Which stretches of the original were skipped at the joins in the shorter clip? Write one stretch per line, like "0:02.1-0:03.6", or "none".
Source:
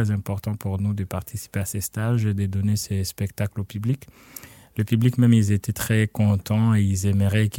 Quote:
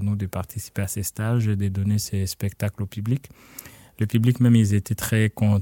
none